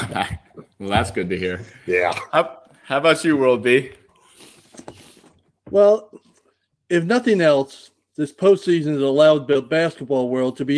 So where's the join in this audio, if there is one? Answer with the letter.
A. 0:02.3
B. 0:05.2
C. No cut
C